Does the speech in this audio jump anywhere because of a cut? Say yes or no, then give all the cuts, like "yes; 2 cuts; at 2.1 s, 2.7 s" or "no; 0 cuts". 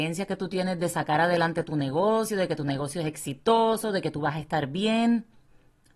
no; 0 cuts